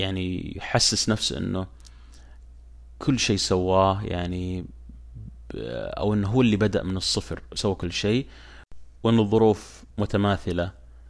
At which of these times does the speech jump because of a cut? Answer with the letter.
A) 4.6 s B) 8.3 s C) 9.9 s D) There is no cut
C